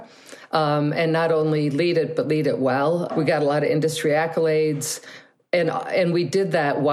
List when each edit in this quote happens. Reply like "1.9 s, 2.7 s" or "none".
3.1 s